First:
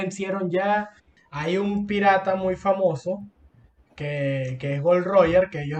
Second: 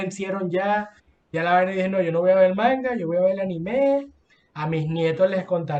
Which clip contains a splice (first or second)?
first